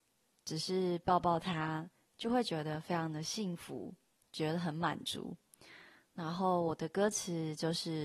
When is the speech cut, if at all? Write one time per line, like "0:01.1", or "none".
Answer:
none